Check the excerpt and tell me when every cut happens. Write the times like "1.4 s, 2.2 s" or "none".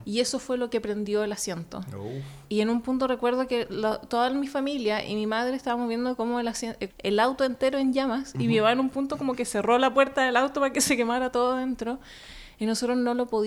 6.9 s